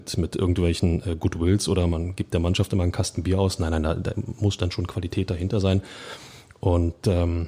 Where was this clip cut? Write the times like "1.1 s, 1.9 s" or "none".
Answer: none